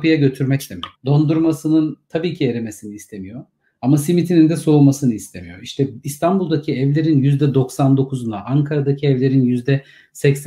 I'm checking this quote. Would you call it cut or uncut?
cut